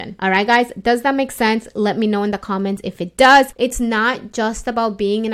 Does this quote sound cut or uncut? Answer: cut